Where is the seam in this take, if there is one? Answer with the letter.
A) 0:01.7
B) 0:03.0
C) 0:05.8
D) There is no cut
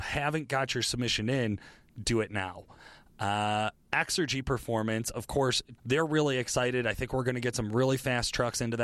C